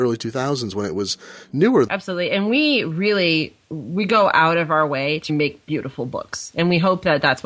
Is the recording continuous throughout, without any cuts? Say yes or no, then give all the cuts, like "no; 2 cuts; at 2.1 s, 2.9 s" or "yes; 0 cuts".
no; 2 cuts; at 1.9 s, 5.3 s